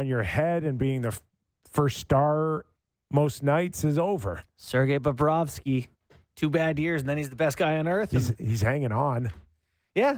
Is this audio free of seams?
yes; 0 cuts

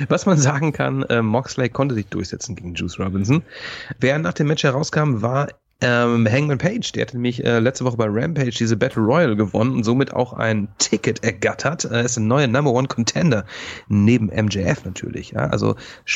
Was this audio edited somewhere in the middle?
yes; 1 cut; at 4.0 s

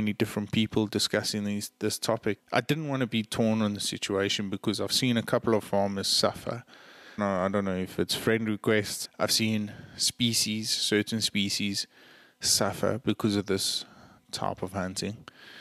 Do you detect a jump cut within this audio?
yes; 3 cuts; at 2.4 s, 7.2 s, 9.1 s

